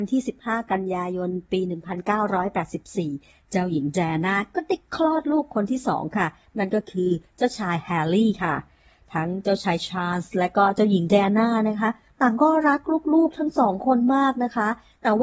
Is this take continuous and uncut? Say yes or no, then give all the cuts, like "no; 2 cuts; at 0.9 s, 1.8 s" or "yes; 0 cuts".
yes; 0 cuts